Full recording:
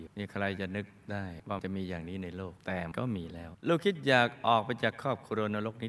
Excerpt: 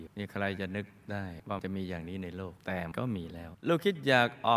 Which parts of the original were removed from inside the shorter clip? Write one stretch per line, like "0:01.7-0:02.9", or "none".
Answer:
none